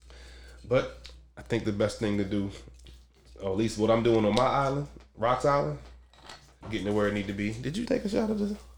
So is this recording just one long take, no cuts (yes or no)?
no